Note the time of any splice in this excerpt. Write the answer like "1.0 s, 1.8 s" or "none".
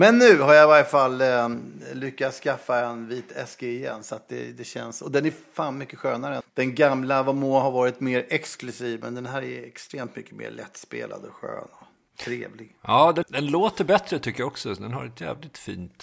6.4 s, 13.2 s